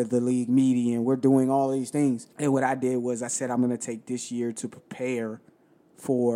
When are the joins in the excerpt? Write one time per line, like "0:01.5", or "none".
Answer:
0:02.3

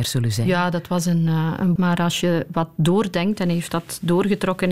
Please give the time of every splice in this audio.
0:01.8

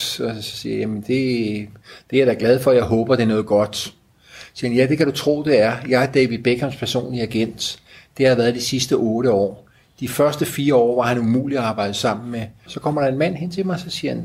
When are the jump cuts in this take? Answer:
0:12.7

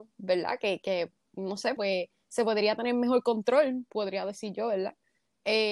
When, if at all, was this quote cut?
0:01.8

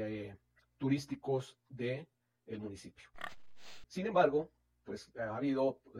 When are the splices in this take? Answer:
0:03.8

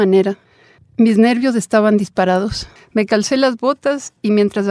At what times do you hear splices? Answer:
0:02.8

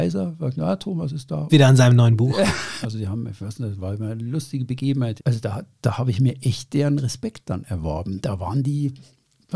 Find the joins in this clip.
0:01.5
0:02.8
0:05.2

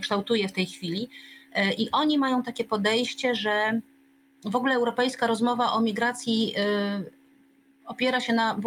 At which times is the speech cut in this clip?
none

